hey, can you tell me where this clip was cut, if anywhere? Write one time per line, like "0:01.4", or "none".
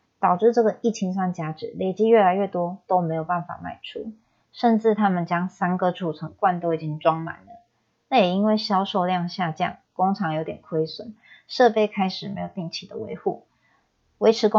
none